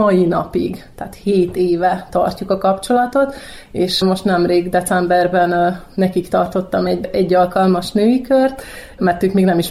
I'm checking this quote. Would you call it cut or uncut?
uncut